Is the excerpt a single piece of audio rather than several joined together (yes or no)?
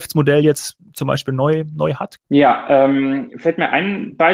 no